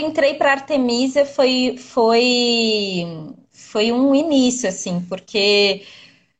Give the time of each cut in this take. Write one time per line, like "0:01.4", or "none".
none

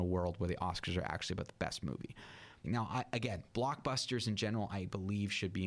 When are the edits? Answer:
0:02.6

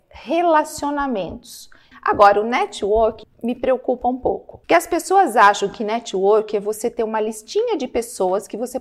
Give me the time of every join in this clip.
0:01.9
0:03.2
0:04.6

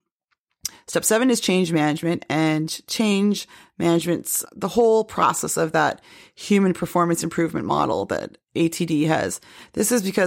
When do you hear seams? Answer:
0:04.5

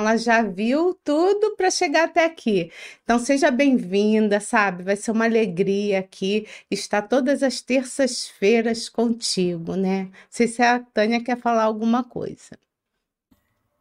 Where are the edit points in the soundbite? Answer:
none

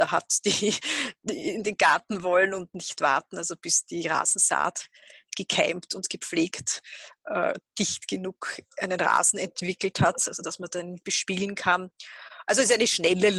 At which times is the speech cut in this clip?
none

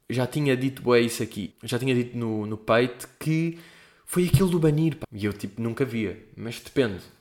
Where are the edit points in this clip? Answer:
0:01.5
0:05.0

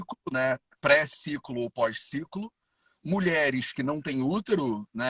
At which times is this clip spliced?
none

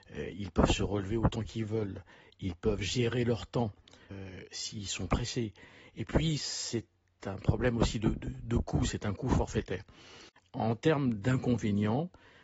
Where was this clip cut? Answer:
none

